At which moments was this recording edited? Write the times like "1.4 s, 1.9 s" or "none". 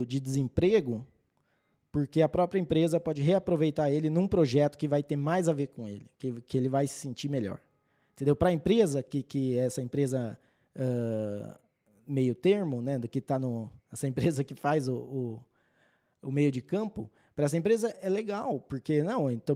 none